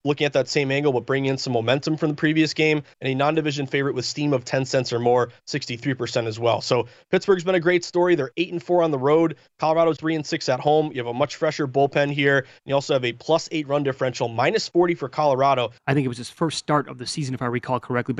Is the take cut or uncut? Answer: cut